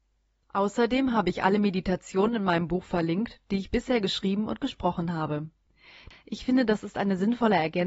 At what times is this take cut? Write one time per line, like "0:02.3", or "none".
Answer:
0:06.1